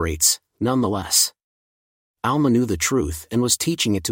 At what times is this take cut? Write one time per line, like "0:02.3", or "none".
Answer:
none